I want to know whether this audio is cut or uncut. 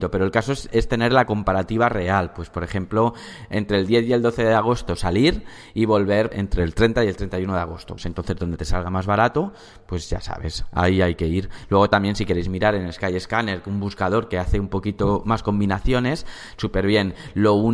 uncut